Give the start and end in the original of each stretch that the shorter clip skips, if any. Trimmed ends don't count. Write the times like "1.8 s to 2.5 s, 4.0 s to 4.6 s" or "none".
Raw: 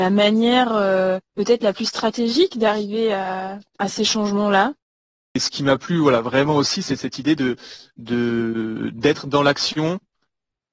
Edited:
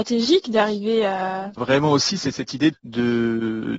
3.6 s to 6.2 s, 7.4 s to 7.9 s